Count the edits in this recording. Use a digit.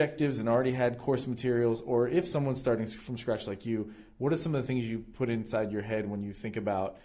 0